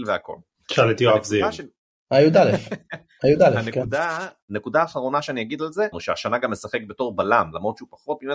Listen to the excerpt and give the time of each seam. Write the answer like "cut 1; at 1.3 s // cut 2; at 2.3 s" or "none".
cut 1; at 4.4 s // cut 2; at 5.9 s